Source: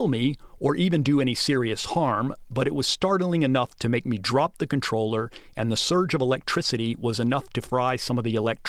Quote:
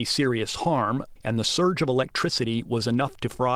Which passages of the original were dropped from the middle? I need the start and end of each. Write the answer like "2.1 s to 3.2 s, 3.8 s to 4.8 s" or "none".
2.5 s to 5.5 s